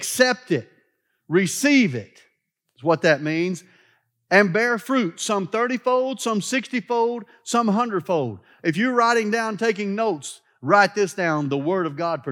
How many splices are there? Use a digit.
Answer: 0